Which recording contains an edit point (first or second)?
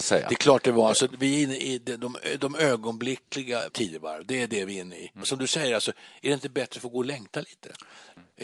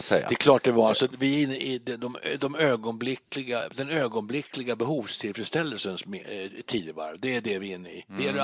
first